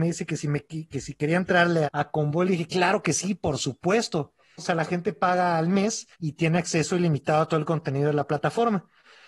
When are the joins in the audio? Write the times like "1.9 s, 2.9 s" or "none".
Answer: 1.8 s, 4.6 s, 6.1 s